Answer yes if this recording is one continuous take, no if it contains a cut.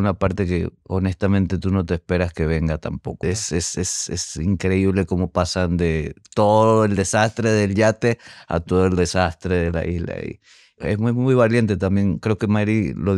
no